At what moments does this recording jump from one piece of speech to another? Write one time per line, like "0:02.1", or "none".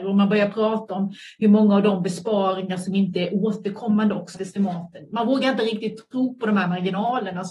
0:04.3